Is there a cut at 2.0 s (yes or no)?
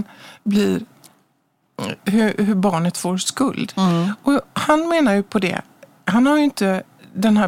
no